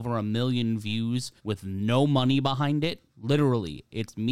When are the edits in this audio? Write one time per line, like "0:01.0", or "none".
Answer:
0:01.4